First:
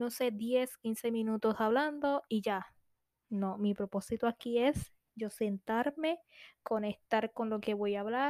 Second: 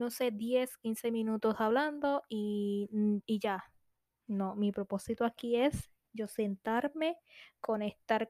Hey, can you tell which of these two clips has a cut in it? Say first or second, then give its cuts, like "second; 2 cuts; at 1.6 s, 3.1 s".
first; 1 cut; at 2.3 s